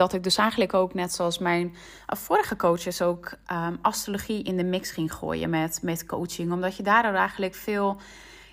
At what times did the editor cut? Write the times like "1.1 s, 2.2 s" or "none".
none